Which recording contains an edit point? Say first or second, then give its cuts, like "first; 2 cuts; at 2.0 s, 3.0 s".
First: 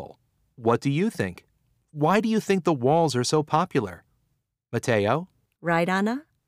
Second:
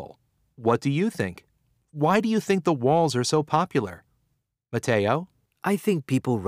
first; 1 cut; at 5.5 s